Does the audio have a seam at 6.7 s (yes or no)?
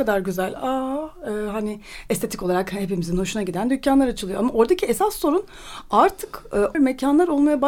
yes